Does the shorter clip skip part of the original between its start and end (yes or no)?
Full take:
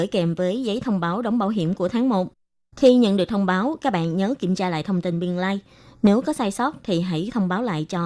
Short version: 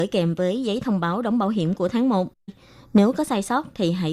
yes